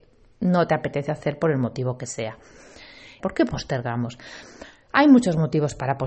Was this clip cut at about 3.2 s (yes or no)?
yes